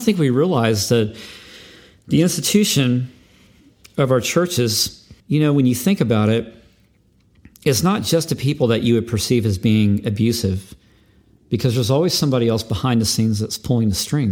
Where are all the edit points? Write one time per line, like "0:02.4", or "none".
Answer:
0:05.2